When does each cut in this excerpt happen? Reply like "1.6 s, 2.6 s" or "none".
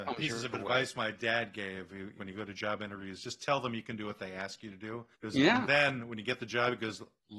2.2 s, 5.1 s